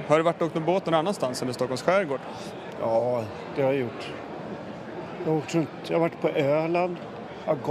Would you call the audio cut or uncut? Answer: uncut